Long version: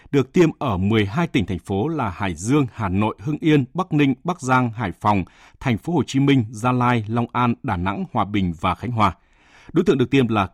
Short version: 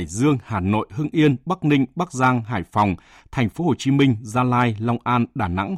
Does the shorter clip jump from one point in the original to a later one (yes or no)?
no